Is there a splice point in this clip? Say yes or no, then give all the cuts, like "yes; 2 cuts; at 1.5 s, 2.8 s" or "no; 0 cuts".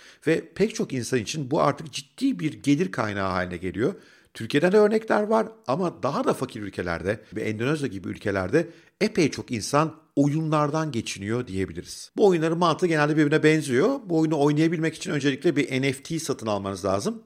yes; 1 cut; at 7.3 s